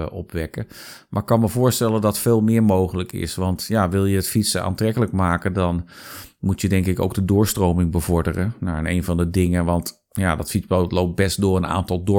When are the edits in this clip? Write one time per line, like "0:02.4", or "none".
none